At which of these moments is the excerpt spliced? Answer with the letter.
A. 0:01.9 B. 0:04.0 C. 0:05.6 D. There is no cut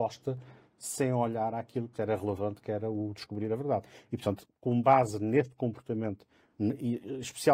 A